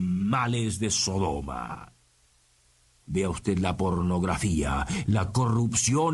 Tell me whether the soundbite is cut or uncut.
cut